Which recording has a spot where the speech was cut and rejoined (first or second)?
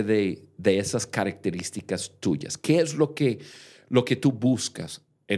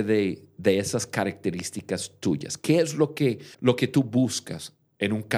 second